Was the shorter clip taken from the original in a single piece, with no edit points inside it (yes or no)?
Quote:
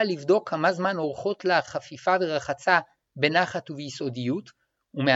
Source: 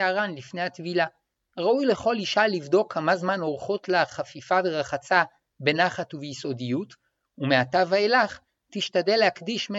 yes